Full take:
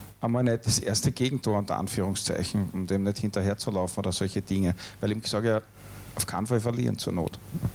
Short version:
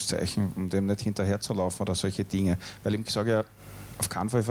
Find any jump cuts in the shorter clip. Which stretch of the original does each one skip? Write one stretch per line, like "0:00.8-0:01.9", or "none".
none

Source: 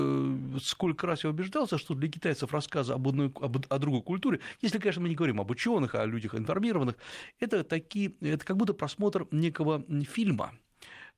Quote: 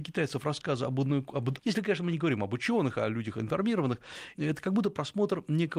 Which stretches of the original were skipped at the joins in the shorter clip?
0:03.7-0:04.6
0:07.3-0:08.2

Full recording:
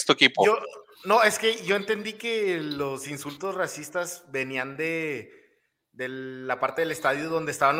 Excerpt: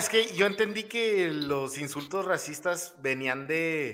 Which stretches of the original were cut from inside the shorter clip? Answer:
none

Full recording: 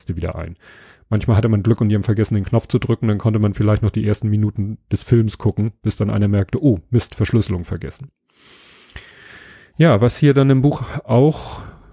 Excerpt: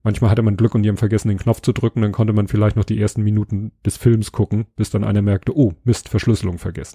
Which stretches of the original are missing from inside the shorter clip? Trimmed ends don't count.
none

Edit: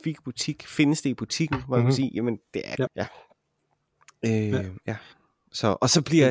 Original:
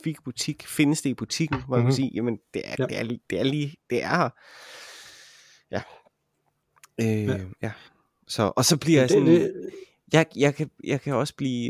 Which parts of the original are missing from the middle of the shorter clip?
0:02.9-0:05.6

